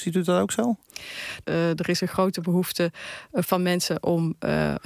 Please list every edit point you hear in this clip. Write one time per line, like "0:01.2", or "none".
0:01.4
0:03.4